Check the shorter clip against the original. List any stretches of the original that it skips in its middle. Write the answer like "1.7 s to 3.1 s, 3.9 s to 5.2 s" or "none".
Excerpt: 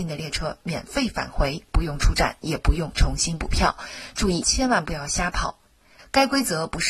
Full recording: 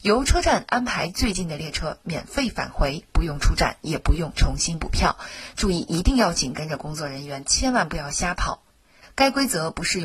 5.8 s to 7.4 s